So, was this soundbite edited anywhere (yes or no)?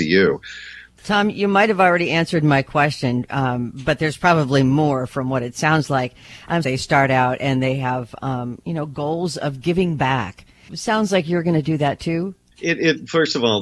yes